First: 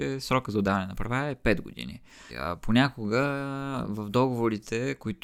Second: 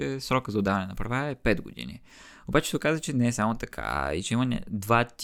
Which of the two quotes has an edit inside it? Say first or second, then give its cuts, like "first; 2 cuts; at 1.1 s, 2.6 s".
first; 1 cut; at 2.3 s